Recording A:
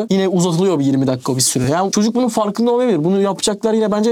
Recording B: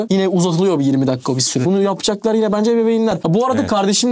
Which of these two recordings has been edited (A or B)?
B